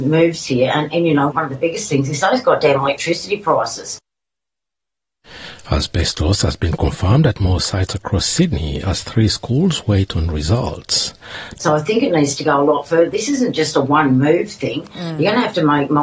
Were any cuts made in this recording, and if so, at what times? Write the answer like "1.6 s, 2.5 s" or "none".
1.3 s, 11.6 s